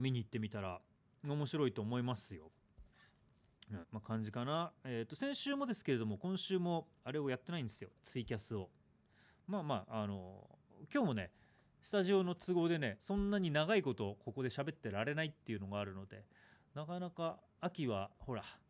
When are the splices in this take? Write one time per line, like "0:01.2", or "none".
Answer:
0:03.8